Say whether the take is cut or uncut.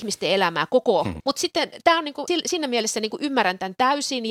cut